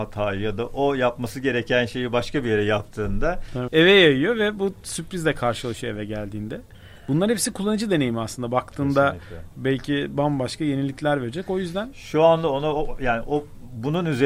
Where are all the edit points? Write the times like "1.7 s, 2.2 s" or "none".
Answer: 3.7 s